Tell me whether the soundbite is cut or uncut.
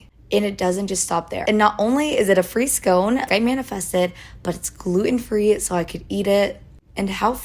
cut